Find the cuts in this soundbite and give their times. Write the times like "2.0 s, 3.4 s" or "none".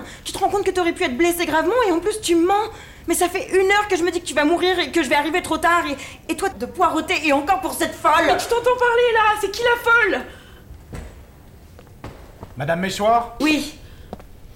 6.5 s, 13.4 s